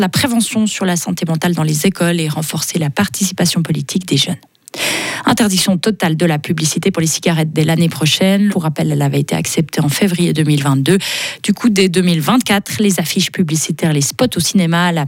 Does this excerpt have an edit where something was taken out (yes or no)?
yes